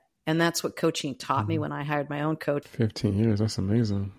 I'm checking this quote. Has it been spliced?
yes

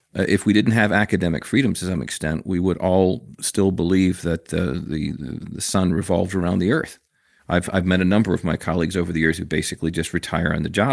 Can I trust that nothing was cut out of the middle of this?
no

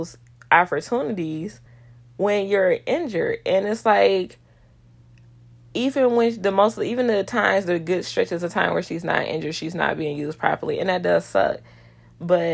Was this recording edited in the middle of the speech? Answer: no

